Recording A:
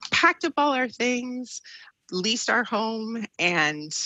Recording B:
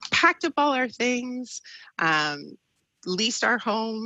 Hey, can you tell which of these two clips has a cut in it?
A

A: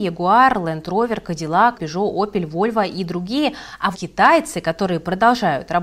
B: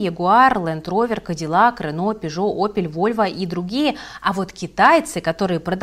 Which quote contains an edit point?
A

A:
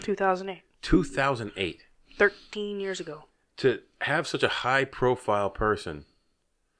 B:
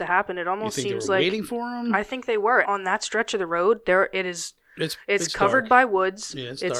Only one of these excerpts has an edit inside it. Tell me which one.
B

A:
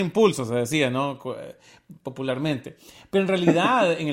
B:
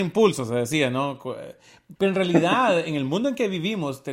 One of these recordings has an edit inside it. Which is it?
B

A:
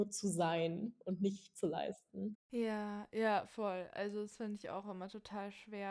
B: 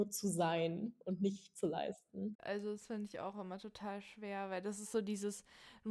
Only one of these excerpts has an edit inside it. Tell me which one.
B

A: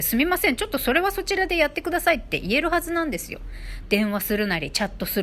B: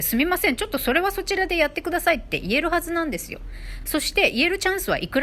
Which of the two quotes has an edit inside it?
A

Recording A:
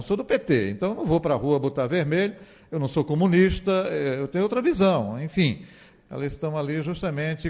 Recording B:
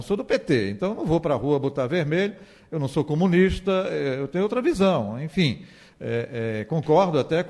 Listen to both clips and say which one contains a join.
A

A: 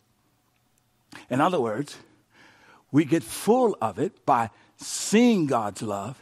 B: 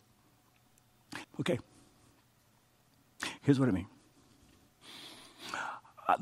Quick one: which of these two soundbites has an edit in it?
B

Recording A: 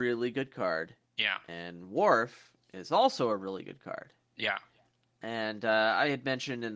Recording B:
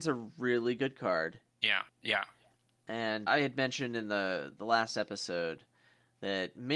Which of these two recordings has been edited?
B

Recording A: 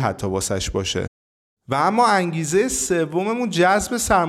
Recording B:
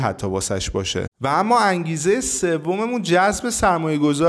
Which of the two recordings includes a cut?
B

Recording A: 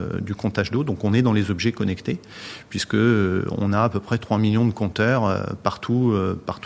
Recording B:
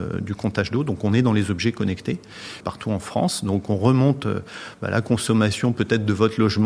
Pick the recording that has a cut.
B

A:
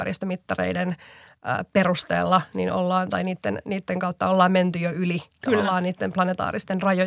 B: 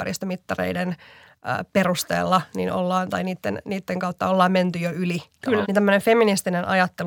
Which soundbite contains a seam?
B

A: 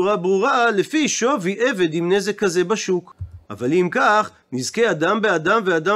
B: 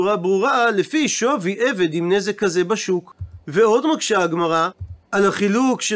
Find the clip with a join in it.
A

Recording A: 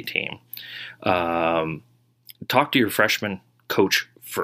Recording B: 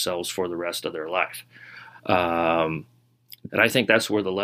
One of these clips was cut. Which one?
B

